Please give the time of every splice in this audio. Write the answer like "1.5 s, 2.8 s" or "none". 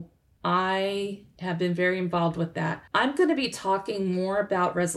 2.9 s